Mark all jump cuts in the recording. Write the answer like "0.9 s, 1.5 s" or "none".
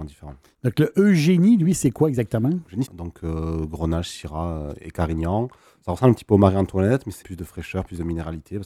2.9 s, 7.2 s